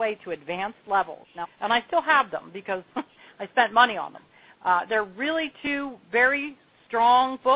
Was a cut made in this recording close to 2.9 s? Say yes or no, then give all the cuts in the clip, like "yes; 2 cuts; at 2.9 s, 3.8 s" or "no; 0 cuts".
yes; 3 cuts; at 1.4 s, 2.9 s, 4.5 s